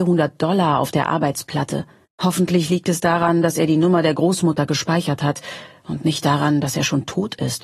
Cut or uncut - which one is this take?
cut